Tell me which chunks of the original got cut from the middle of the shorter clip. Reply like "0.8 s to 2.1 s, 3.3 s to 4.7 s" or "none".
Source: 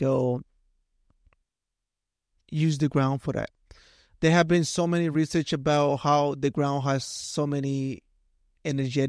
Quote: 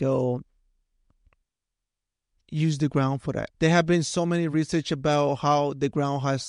3.5 s to 4.2 s